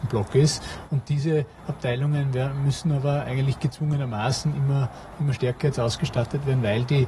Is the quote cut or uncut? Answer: uncut